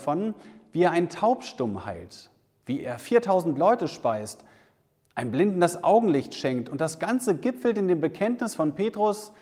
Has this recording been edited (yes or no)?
no